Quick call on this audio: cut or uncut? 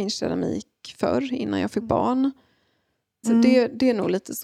cut